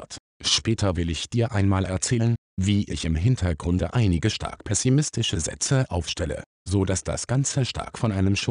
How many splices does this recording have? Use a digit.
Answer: 0